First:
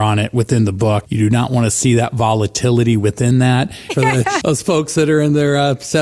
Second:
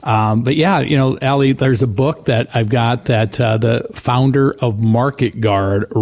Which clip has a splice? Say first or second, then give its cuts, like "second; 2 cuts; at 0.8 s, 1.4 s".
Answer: first; 2 cuts; at 1.0 s, 3.9 s